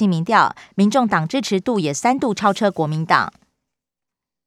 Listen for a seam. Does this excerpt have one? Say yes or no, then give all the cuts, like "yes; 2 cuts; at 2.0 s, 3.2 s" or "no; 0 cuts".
no; 0 cuts